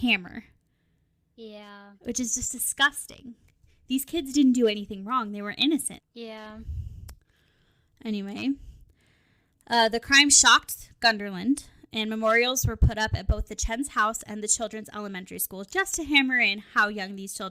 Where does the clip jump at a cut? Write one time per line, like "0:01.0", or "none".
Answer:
0:06.0